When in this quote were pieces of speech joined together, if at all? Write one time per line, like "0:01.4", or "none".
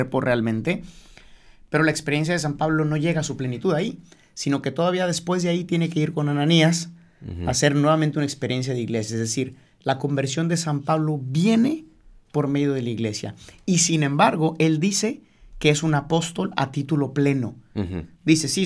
none